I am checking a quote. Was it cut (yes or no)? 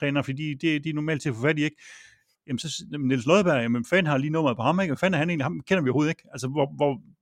yes